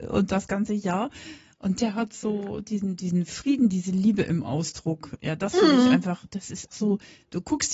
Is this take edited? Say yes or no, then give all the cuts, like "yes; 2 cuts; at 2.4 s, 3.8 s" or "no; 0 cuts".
yes; 1 cut; at 6.7 s